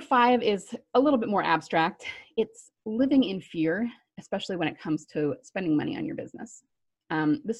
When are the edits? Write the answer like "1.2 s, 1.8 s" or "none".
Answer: none